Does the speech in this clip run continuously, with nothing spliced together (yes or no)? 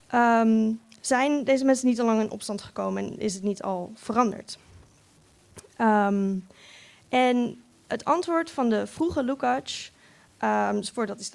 yes